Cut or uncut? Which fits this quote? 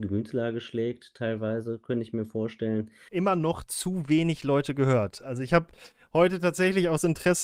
cut